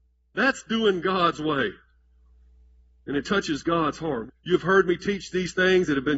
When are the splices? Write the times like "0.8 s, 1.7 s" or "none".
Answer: 4.3 s